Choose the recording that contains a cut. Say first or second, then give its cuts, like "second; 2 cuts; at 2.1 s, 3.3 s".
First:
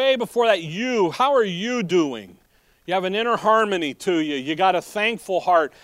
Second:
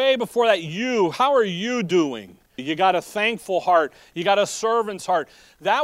second; 1 cut; at 2.6 s